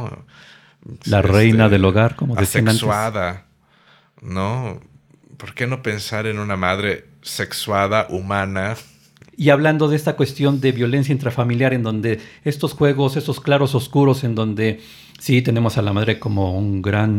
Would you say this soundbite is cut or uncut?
cut